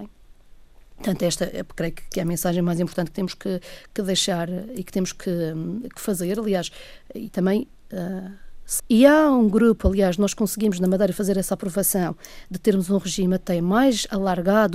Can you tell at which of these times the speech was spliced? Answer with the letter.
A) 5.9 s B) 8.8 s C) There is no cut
B